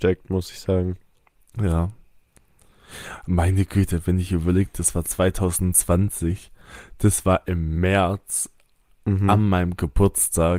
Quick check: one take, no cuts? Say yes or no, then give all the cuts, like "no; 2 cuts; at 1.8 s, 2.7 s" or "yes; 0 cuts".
yes; 0 cuts